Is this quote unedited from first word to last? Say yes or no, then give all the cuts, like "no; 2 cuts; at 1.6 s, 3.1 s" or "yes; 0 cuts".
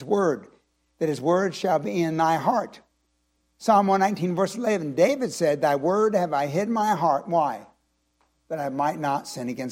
yes; 0 cuts